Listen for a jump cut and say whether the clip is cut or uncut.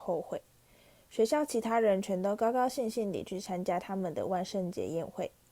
uncut